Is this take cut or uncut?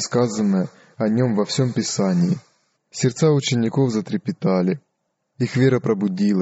uncut